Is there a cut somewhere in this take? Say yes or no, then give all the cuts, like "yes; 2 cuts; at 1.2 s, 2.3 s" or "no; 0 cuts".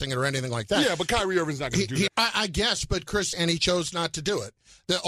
yes; 2 cuts; at 2.1 s, 3.3 s